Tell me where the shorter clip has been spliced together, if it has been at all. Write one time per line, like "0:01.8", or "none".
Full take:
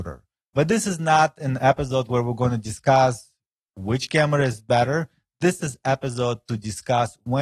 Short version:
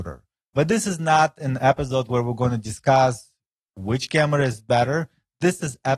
none